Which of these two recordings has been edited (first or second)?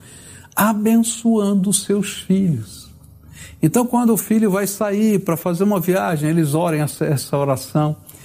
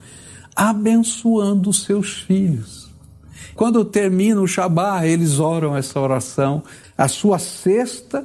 second